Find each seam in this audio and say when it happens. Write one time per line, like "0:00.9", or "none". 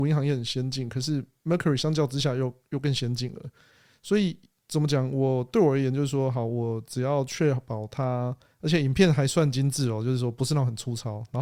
0:08.5